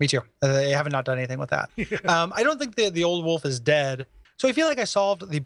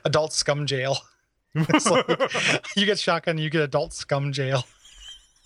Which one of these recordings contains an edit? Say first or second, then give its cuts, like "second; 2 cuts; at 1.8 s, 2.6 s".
first; 2 cuts; at 1.7 s, 4.2 s